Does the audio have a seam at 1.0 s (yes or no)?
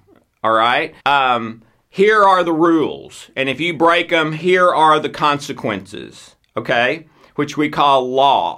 yes